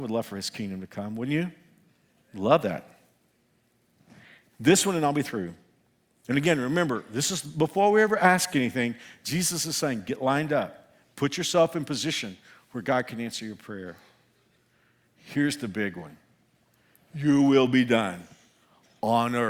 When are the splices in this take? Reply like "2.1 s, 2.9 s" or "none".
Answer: none

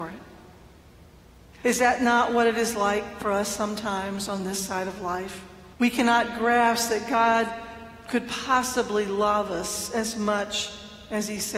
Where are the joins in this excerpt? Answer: 1.6 s, 5.7 s

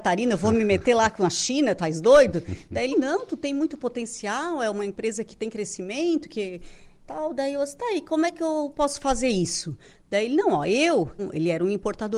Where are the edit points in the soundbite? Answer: 2.9 s, 11.2 s

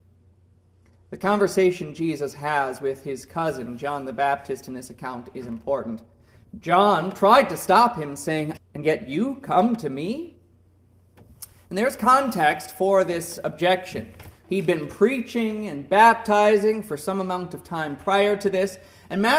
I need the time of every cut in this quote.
8.6 s, 14.4 s

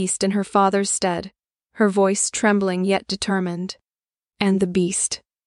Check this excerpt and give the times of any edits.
4.3 s

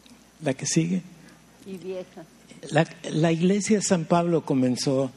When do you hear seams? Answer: 1.6 s, 2.6 s

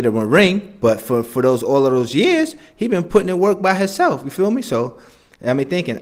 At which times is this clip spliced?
none

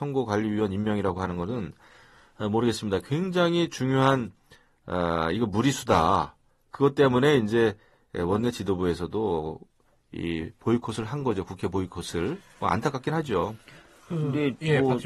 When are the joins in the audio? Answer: none

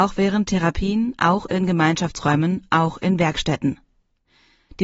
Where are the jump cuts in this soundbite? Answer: none

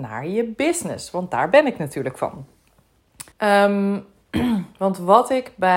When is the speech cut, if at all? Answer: 3.3 s

